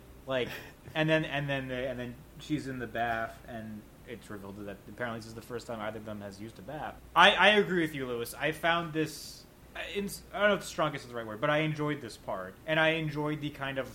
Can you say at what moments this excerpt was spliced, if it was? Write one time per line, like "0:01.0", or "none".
0:02.3
0:12.6